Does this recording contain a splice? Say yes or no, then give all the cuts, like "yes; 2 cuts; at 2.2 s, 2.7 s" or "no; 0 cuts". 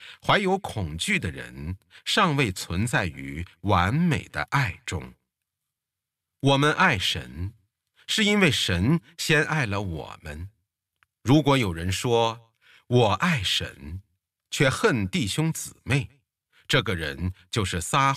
no; 0 cuts